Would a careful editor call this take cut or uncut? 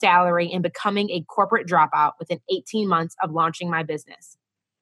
uncut